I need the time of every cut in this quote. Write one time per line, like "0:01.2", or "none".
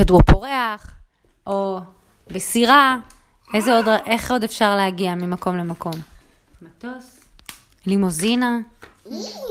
0:06.5